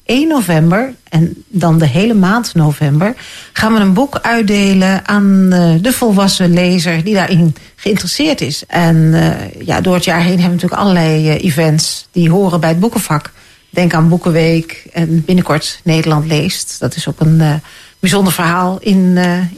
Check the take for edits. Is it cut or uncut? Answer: cut